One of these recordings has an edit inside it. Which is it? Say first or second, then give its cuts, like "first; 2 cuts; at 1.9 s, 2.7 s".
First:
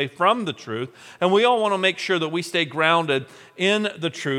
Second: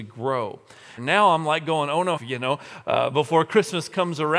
second; 2 cuts; at 1.0 s, 2.2 s